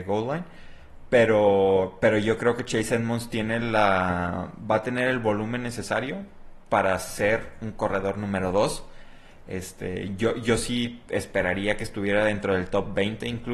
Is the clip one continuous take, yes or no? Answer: yes